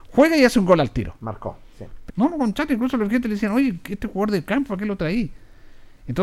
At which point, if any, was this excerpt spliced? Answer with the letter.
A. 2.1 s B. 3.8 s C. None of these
A